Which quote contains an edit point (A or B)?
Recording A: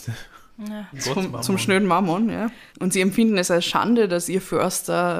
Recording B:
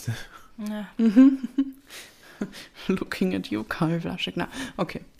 A